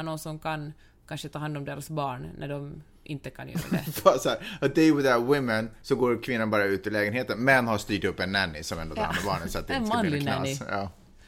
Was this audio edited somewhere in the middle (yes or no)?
no